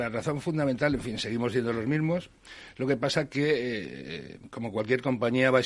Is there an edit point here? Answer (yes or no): no